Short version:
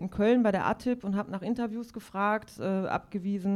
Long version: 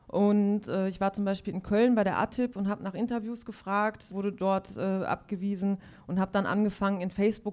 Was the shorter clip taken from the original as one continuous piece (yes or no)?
no